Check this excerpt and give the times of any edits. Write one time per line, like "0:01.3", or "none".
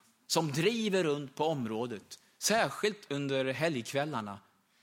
0:03.1